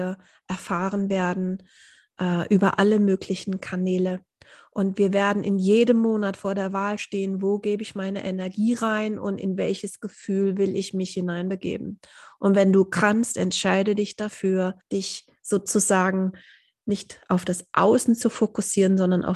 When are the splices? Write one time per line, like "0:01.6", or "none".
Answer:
0:14.8